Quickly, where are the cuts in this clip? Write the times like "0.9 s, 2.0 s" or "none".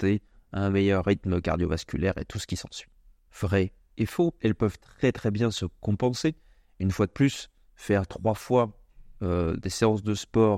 3.3 s